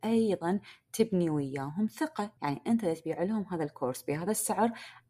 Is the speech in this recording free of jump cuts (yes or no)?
no